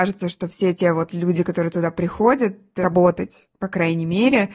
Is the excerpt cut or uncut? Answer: uncut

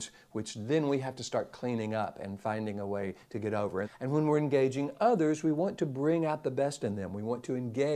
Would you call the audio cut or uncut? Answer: cut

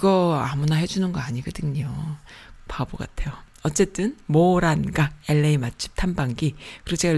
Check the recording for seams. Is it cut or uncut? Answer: cut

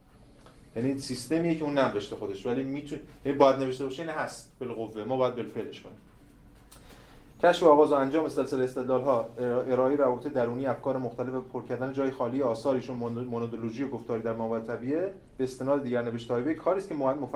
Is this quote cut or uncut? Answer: cut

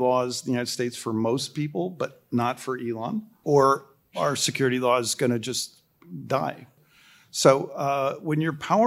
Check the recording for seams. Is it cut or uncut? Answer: uncut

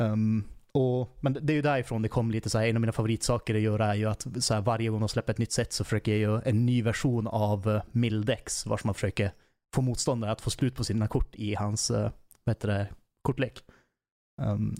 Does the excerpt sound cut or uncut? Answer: uncut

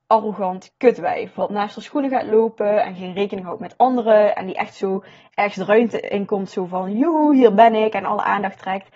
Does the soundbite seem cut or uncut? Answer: uncut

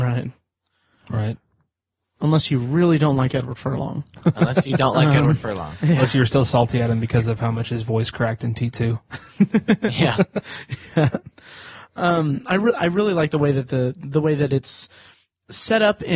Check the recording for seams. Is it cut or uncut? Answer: uncut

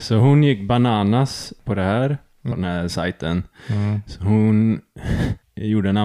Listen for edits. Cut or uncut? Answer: cut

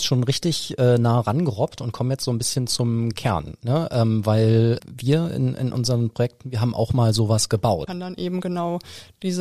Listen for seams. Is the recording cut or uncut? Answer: cut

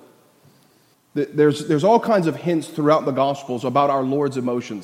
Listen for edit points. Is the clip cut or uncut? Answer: cut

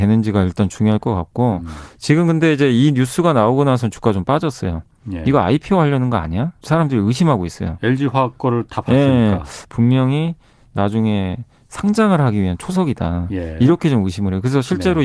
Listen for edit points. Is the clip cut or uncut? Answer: cut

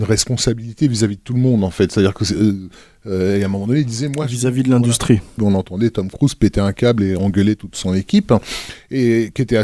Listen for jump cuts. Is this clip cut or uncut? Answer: cut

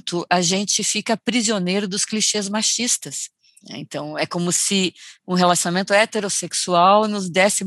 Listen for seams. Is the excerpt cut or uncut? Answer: cut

